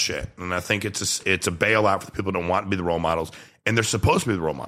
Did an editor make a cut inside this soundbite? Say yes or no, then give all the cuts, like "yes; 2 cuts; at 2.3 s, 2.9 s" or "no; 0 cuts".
yes; 1 cut; at 1.2 s